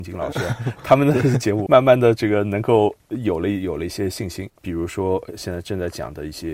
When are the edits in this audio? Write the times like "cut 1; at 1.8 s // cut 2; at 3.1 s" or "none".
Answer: cut 1; at 1.7 s // cut 2; at 4.6 s